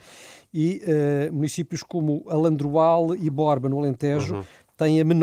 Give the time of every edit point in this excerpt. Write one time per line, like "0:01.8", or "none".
none